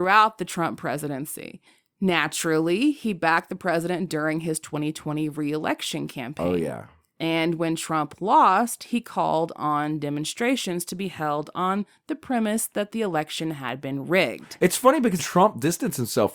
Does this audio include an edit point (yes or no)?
yes